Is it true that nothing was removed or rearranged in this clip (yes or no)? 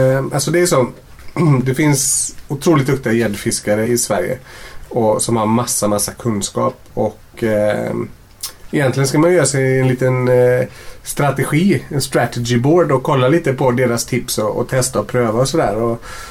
no